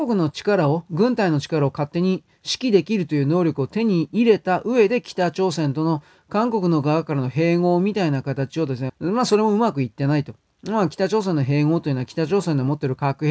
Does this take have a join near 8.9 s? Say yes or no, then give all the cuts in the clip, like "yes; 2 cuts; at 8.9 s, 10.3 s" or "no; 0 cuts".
yes; 1 cut; at 8.9 s